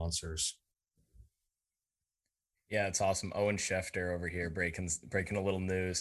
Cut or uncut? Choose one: uncut